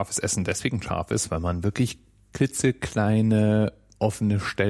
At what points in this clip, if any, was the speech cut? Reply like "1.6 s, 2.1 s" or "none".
none